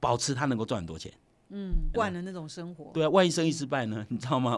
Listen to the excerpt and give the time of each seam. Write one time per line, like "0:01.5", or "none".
0:01.9